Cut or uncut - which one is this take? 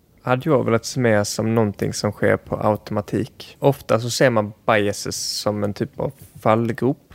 uncut